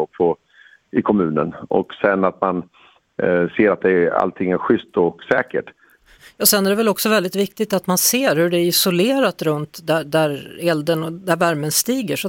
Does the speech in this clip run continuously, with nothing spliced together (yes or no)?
no